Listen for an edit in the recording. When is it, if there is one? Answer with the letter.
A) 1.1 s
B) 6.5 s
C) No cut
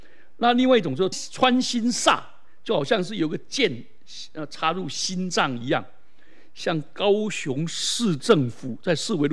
A